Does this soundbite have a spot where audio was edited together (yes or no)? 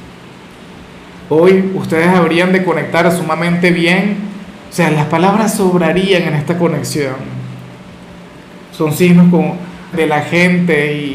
yes